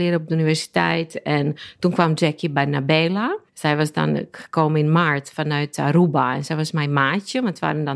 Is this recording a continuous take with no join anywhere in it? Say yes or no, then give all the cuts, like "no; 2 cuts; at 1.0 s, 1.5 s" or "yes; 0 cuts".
no; 1 cut; at 3.5 s